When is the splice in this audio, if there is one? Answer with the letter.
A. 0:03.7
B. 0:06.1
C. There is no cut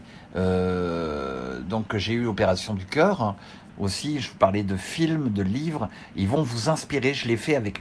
A